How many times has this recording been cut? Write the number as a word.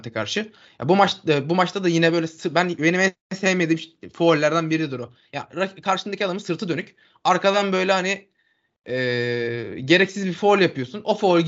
zero